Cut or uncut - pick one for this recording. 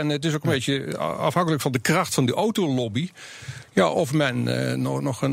uncut